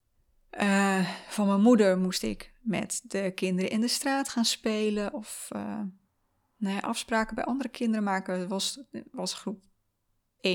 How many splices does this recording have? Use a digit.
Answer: 0